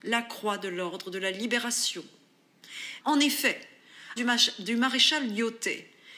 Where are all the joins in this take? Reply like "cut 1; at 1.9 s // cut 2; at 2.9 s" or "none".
cut 1; at 3.0 s // cut 2; at 4.2 s